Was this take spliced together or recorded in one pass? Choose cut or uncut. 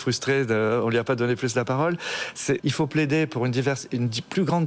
cut